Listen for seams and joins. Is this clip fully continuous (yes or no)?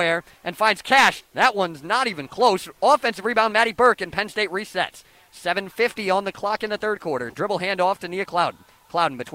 no